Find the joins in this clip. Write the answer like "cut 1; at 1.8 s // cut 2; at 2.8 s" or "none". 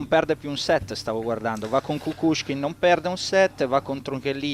none